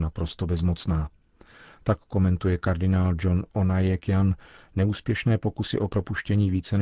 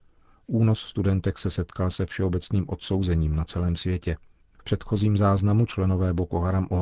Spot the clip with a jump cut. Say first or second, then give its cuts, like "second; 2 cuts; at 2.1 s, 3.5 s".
second; 1 cut; at 4.4 s